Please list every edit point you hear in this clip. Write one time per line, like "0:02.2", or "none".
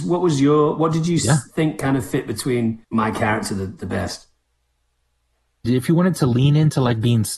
0:02.8
0:05.6